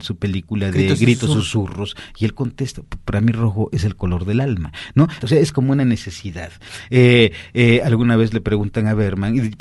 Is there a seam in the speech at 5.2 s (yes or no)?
yes